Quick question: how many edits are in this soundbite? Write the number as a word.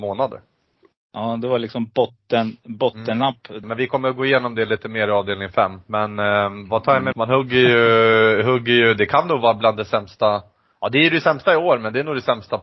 two